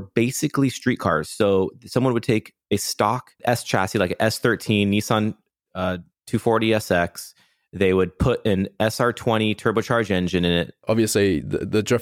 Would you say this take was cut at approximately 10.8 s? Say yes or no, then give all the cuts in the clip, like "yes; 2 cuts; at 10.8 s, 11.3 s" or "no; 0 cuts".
yes; 1 cut; at 10.8 s